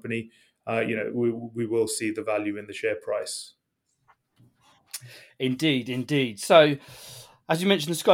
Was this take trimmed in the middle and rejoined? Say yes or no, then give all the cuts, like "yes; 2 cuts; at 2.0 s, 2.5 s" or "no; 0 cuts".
no; 0 cuts